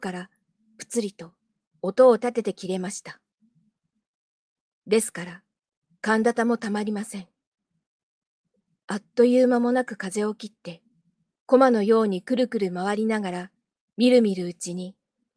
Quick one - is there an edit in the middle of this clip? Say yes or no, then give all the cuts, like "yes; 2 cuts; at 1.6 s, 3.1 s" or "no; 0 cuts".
no; 0 cuts